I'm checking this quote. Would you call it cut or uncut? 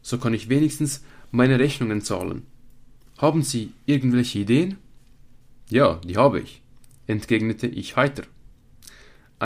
uncut